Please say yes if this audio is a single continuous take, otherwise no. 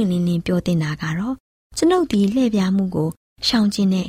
yes